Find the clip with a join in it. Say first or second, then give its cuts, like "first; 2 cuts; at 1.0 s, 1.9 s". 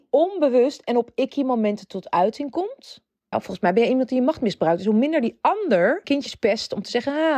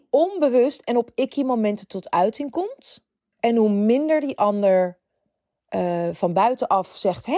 first; 2 cuts; at 3.3 s, 6.0 s